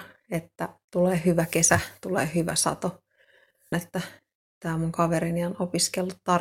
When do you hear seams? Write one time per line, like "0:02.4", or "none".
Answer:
0:03.7

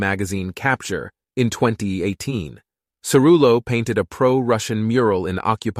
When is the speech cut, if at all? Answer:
0:02.9

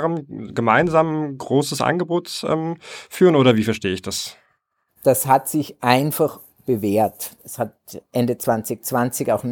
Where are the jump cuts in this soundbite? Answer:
0:04.9
0:07.4

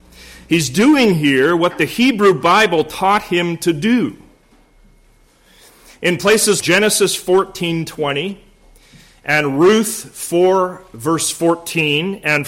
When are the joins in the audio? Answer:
0:06.6

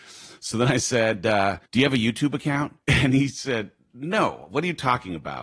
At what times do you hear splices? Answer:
0:01.7
0:02.8

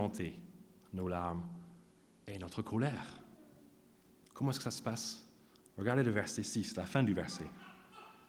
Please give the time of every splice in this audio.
none

